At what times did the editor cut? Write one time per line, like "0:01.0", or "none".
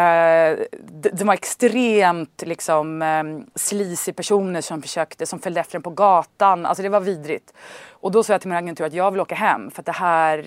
none